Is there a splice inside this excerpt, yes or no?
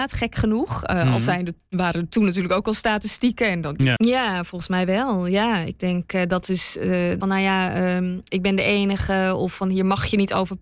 yes